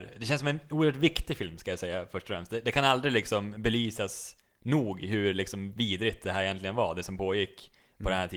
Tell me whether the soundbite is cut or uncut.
uncut